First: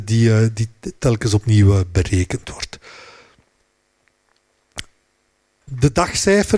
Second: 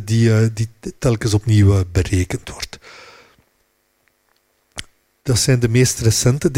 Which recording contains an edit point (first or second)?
second